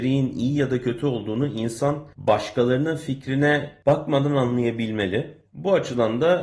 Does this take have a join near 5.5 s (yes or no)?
yes